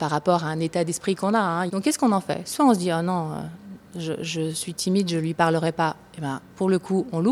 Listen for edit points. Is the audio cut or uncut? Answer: cut